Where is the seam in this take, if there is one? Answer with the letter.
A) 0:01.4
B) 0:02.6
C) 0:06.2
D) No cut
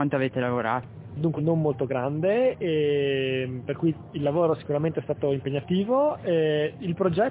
A